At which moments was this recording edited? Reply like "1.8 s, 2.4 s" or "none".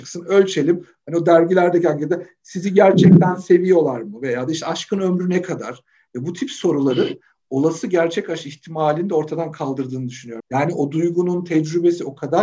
6.1 s, 10.4 s

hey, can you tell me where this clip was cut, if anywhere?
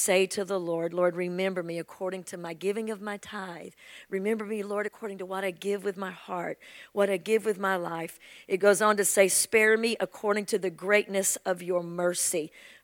none

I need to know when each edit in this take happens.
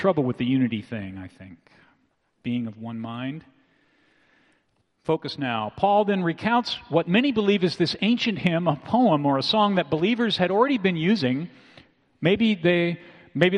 4.8 s

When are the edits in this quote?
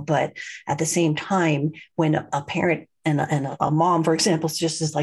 none

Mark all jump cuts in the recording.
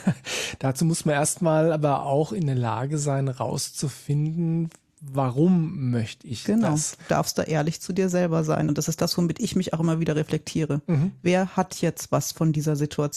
8.7 s

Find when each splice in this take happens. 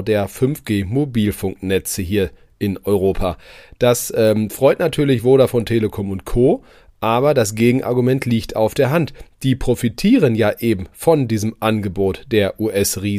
none

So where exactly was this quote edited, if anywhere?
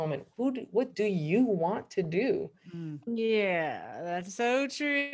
3.1 s

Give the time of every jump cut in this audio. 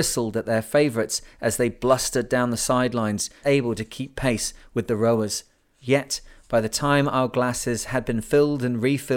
3.4 s, 5.8 s

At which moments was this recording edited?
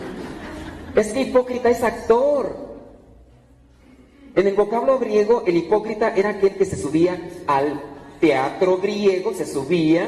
none

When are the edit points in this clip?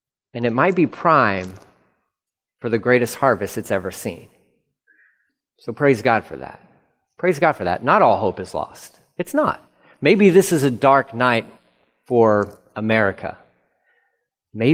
none

